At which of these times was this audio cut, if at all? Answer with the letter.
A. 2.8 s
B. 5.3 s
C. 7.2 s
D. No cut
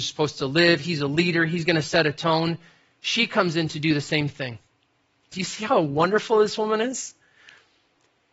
B